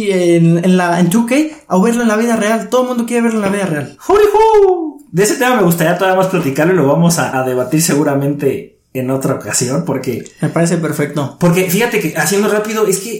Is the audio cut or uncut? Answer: cut